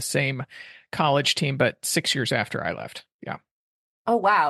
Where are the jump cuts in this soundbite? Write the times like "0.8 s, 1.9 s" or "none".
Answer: none